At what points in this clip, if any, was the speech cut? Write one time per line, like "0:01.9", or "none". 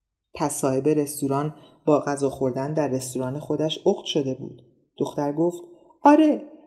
none